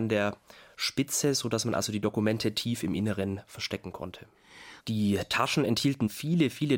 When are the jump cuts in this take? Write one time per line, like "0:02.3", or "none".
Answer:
0:04.8